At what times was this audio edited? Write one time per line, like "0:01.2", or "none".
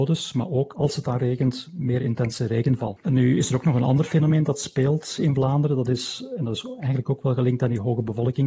0:03.0